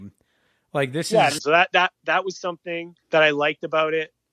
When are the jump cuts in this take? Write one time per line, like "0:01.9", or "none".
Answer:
0:01.4
0:03.0